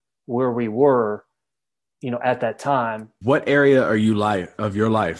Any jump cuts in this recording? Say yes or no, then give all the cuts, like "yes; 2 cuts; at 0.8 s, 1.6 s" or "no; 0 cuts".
yes; 1 cut; at 3.2 s